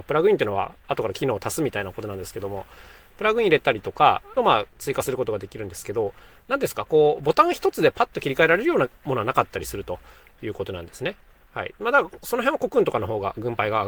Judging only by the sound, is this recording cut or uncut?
cut